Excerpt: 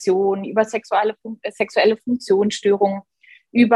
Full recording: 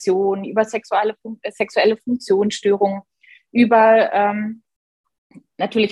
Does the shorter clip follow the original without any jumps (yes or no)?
yes